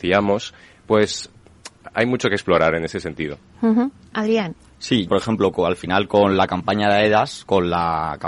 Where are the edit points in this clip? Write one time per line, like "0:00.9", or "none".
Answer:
0:05.1